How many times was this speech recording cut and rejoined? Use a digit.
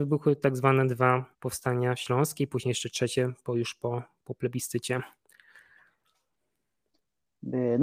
1